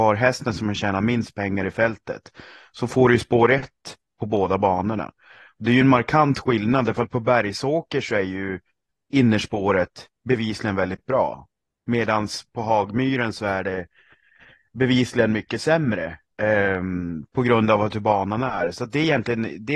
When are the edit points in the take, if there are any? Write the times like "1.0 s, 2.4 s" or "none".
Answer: none